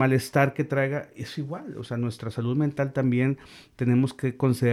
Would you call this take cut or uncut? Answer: uncut